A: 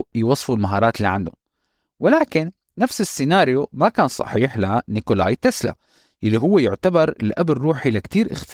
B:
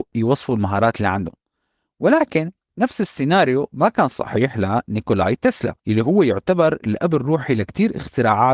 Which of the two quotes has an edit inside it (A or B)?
B